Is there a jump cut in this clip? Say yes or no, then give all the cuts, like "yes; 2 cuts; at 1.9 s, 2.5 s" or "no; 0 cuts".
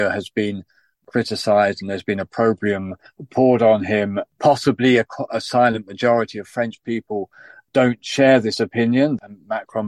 no; 0 cuts